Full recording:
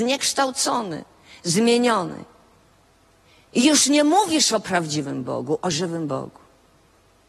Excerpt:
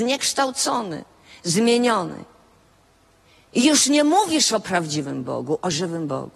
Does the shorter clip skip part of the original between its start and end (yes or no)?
no